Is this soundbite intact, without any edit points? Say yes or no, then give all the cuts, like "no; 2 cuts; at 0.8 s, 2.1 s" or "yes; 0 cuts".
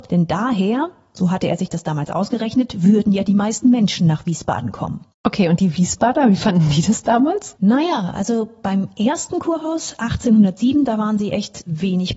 yes; 0 cuts